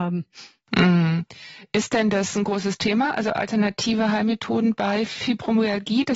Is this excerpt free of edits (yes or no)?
yes